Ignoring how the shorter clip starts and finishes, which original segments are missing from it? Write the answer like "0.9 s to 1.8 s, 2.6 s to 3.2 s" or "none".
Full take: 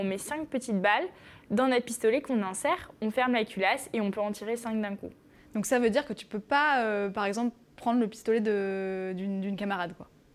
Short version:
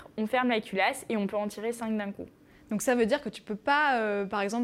none